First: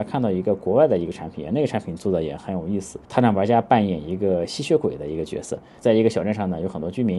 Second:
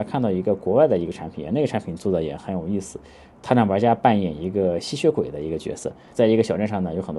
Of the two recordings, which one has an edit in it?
first; 1 cut; at 3.0 s

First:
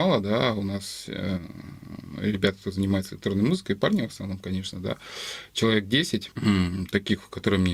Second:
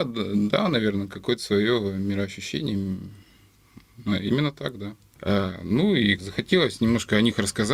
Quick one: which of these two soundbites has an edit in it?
second; 2 cuts; at 5.2 s, 6.2 s

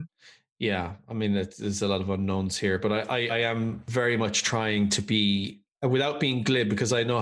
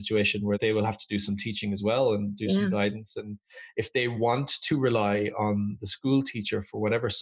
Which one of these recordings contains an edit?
first; 1 cut; at 3.3 s

